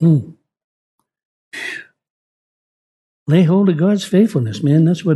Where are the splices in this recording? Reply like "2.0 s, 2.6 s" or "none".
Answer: none